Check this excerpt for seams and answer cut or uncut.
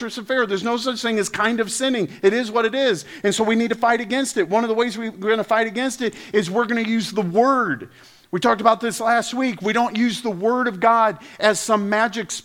uncut